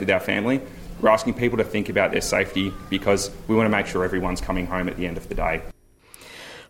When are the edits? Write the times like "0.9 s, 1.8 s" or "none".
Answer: none